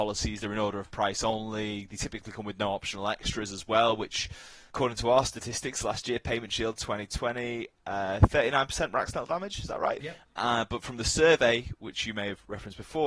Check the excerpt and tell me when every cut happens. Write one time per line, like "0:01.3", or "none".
0:10.0